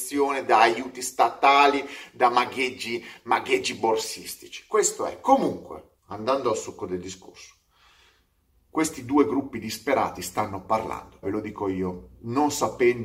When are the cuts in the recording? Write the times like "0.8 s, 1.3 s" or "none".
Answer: 6.0 s, 11.2 s